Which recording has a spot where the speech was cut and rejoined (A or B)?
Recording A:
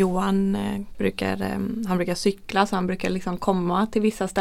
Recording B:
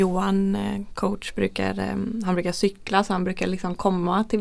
A